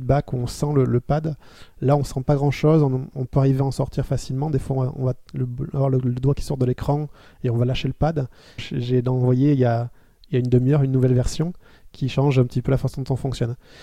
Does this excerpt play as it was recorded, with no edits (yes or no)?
no